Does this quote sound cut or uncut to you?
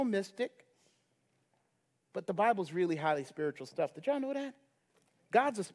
uncut